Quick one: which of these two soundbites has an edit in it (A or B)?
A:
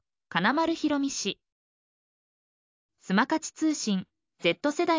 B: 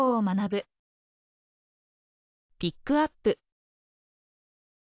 A